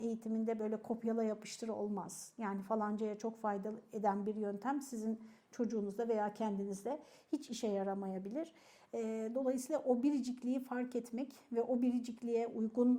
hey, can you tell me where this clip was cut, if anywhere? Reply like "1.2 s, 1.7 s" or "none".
none